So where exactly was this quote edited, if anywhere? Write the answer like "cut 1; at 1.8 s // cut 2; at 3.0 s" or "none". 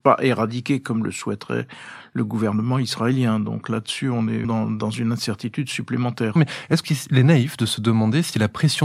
cut 1; at 4.4 s // cut 2; at 6.4 s